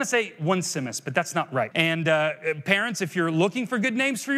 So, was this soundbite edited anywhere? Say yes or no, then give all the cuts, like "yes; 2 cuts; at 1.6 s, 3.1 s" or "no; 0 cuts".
yes; 1 cut; at 1.7 s